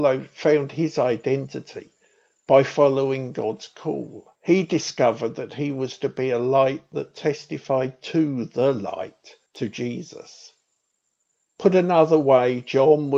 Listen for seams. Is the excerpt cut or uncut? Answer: cut